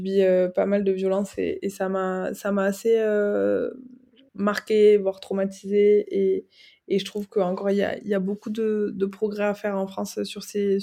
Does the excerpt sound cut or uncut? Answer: uncut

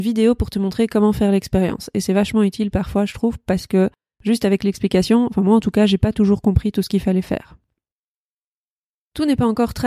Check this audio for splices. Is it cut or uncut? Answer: uncut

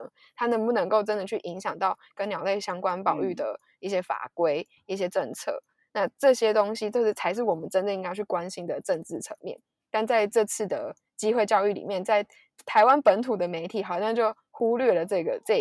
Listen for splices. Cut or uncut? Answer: uncut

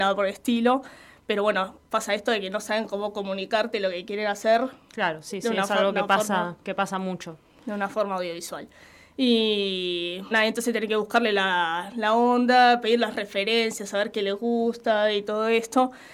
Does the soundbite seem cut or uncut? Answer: cut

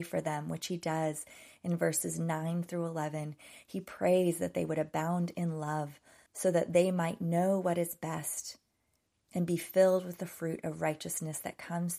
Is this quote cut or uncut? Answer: cut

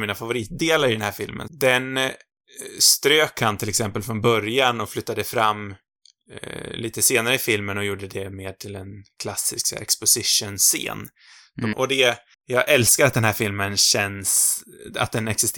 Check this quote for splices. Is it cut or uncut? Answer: cut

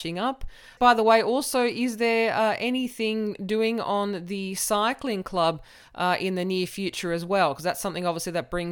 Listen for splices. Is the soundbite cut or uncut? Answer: uncut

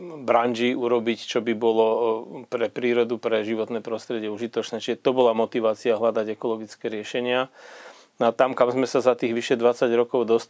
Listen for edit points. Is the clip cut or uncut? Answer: uncut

